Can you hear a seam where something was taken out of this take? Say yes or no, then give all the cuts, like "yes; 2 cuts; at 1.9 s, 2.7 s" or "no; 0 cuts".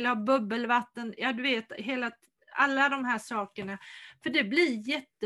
no; 0 cuts